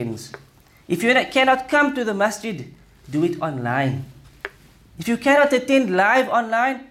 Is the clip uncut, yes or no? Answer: yes